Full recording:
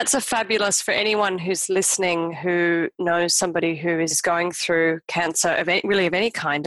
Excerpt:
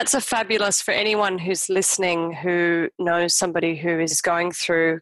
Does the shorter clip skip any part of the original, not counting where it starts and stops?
no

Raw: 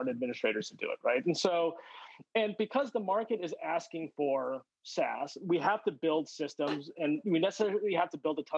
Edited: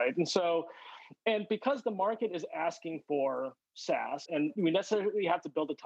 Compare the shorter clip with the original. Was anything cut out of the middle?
yes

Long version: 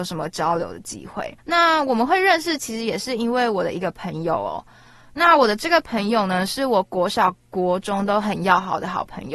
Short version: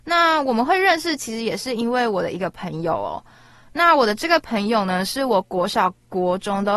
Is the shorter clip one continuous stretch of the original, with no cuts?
yes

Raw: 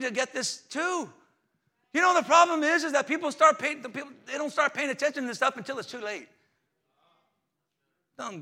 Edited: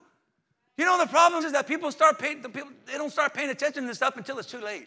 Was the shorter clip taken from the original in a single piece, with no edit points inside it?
no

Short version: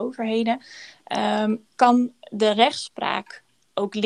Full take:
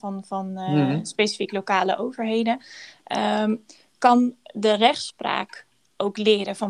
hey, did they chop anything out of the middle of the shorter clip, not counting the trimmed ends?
yes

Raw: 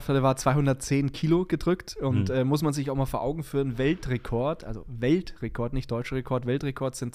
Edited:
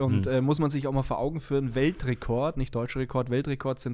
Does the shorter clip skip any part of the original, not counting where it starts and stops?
yes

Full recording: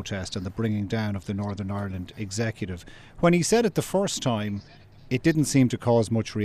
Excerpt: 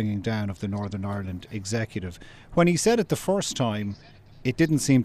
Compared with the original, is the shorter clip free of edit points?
yes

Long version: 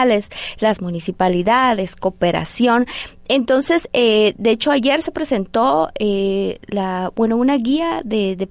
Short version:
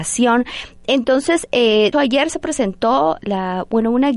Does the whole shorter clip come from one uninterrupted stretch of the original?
no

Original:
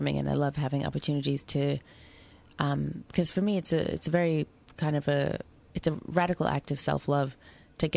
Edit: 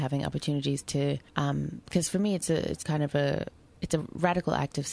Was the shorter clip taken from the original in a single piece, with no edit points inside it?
no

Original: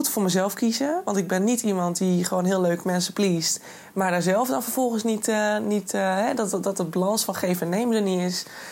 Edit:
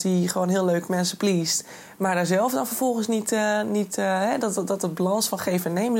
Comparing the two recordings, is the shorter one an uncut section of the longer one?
yes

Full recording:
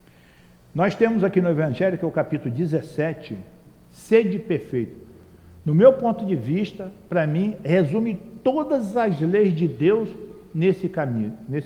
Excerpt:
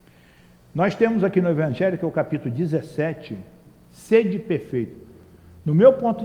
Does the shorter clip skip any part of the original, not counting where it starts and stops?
no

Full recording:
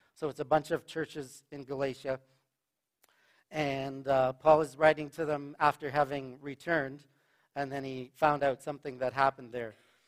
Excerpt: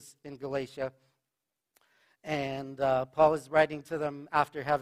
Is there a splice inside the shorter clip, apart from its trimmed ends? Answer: no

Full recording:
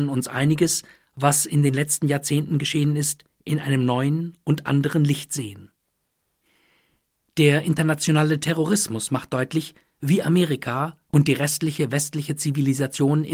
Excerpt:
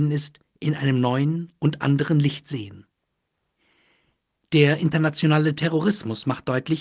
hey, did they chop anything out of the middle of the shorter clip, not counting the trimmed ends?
no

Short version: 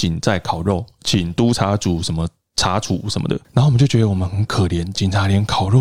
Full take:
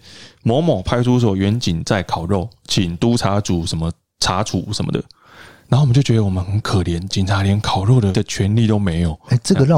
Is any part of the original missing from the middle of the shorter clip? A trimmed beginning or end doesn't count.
yes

